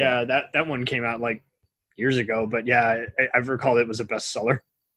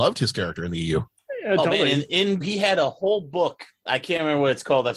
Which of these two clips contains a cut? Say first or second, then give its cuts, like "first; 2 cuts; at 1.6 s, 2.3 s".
second; 1 cut; at 2.4 s